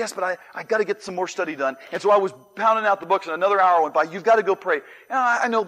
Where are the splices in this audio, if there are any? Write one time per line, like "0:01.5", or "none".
none